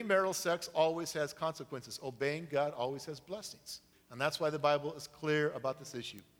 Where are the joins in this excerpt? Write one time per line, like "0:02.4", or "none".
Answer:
0:03.9